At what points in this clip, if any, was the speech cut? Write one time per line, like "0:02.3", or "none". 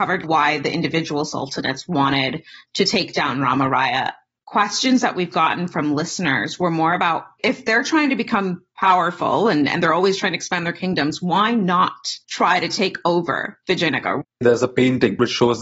0:12.2
0:14.2